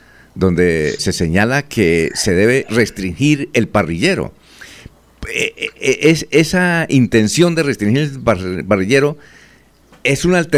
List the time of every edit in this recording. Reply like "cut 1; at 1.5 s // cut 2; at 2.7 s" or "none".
cut 1; at 1.0 s